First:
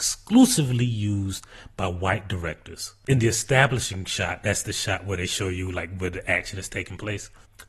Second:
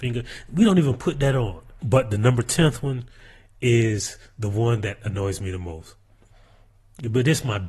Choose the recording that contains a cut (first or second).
second